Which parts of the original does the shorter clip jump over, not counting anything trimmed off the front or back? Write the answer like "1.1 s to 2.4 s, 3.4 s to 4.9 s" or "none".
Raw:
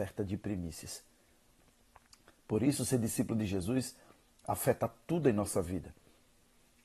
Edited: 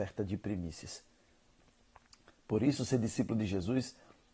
none